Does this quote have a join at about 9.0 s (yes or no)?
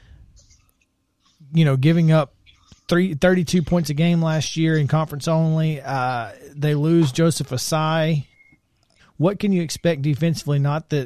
yes